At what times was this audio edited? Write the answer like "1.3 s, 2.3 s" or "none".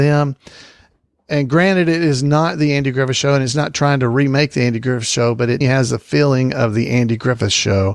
5.6 s